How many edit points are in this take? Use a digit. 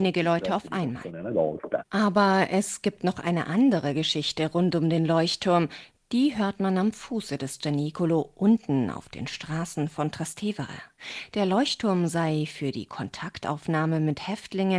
0